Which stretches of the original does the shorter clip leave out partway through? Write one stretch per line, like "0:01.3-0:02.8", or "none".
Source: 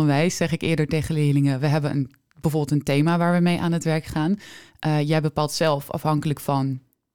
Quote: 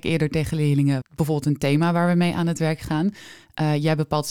0:01.6-0:02.3